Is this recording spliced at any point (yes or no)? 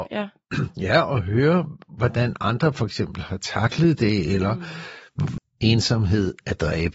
yes